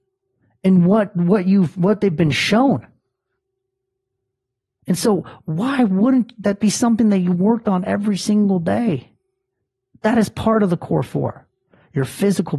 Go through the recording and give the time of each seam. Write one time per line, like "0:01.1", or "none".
none